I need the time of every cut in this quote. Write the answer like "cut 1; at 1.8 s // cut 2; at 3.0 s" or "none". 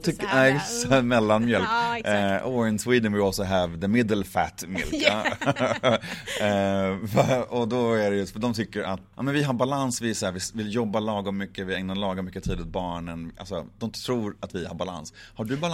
cut 1; at 9.1 s